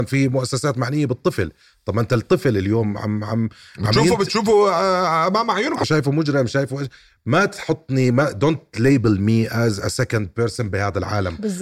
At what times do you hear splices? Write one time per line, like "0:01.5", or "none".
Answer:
0:05.8